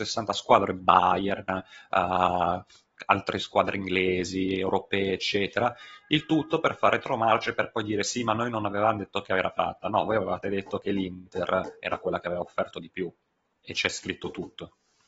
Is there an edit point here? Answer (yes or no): no